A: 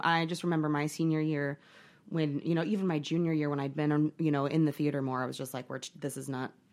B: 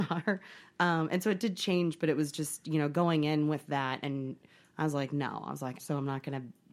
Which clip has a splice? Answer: B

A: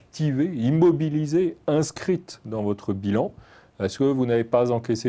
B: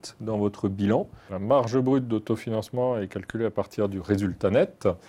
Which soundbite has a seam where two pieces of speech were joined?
B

